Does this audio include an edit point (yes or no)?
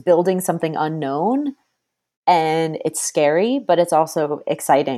no